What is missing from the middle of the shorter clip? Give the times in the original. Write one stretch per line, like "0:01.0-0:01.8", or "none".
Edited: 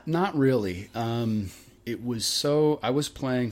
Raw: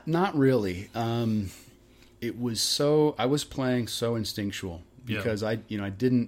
0:01.8-0:02.1